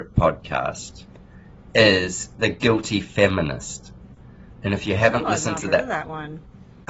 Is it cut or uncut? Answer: uncut